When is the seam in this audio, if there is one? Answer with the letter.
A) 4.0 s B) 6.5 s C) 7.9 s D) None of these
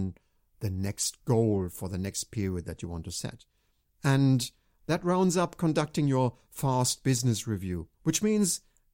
C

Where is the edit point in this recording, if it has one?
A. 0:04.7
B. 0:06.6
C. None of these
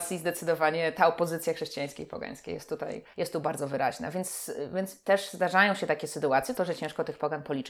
B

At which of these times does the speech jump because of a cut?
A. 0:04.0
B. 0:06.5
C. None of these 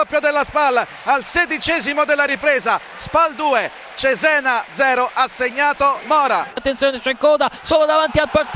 B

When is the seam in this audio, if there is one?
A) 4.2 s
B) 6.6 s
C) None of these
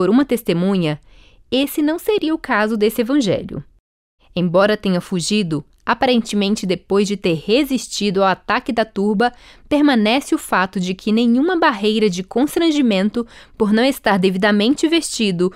A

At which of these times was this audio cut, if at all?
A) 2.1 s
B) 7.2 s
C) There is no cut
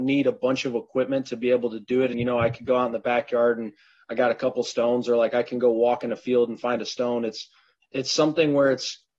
A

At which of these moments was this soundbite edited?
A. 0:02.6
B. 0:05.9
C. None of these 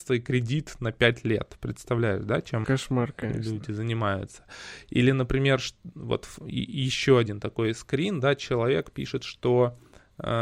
A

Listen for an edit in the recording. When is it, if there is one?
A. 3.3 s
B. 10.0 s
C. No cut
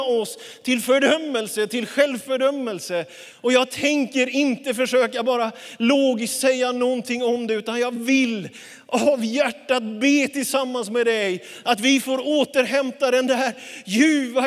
A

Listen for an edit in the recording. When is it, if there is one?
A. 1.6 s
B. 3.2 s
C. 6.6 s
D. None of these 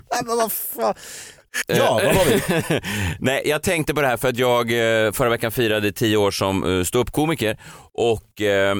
A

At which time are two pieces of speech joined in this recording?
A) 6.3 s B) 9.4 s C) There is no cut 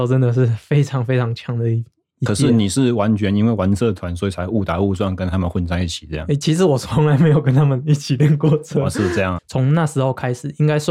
B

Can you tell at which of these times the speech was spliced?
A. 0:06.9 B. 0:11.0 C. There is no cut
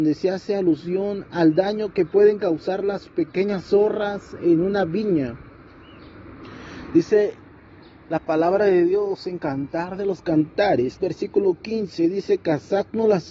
B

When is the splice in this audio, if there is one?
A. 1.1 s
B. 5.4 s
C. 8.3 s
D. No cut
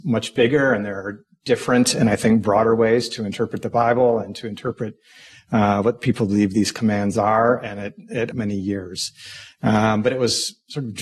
C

